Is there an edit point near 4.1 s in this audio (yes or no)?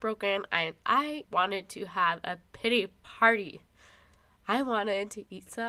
no